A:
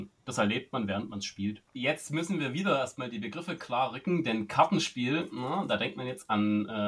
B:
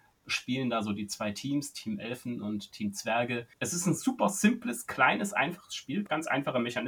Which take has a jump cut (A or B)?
A